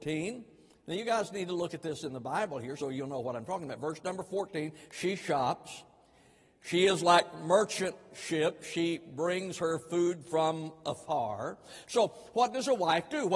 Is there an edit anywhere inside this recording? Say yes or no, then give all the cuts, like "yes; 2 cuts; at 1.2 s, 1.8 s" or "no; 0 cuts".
no; 0 cuts